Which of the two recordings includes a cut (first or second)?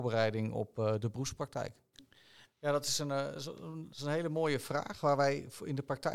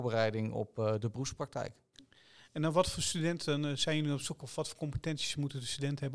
first